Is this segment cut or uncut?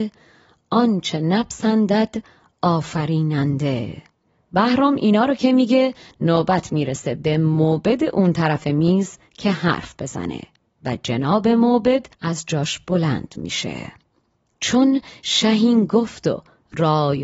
cut